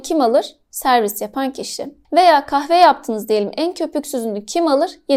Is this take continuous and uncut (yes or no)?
yes